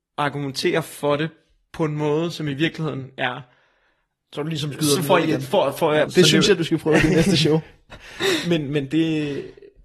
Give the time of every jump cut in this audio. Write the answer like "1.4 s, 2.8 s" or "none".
6.1 s